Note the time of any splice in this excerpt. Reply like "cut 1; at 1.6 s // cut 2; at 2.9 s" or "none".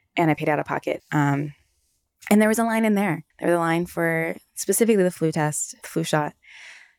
cut 1; at 1.0 s // cut 2; at 3.3 s // cut 3; at 5.8 s